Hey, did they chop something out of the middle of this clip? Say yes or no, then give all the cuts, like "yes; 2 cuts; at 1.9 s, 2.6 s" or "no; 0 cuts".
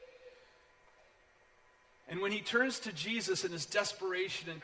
yes; 1 cut; at 2.0 s